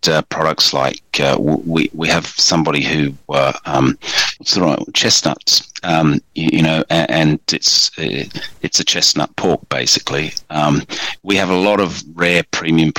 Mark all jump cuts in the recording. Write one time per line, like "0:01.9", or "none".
0:04.4